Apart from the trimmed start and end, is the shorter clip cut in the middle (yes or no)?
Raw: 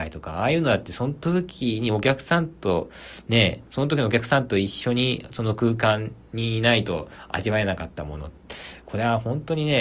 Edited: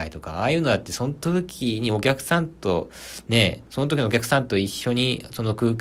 no